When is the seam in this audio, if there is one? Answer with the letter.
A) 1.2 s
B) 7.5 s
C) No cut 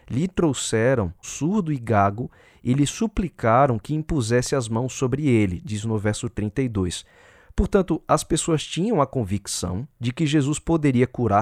A